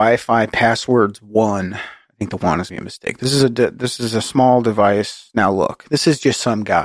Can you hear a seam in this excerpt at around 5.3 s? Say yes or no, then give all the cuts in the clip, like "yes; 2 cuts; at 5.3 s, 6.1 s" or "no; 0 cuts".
no; 1 cut; at 2.7 s